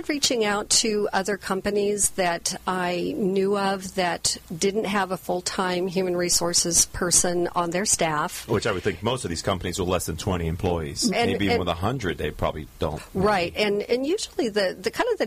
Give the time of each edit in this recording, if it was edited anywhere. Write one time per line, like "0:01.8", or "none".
0:11.1